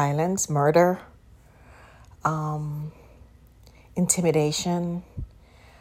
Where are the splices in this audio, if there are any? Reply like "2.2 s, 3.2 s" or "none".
none